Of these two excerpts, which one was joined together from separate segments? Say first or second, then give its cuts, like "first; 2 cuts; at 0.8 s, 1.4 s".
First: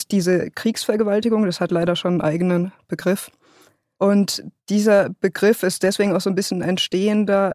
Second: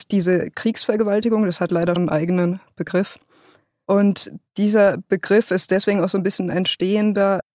second; 1 cut; at 2.0 s